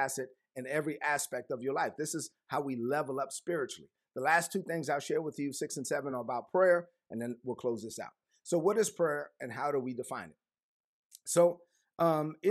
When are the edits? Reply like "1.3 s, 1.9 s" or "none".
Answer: none